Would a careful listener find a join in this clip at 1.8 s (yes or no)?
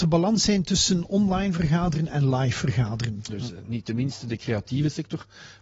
no